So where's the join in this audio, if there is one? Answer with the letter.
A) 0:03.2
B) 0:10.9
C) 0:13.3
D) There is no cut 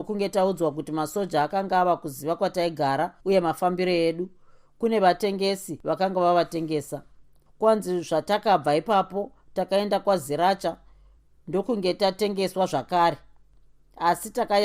A